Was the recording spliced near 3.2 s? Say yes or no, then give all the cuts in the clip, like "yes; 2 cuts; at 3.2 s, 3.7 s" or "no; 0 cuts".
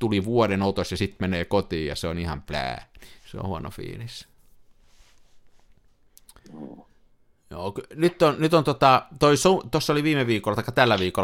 yes; 1 cut; at 3.2 s